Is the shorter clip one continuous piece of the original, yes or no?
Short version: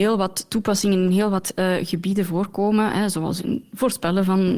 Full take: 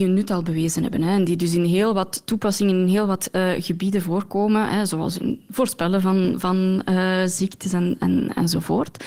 yes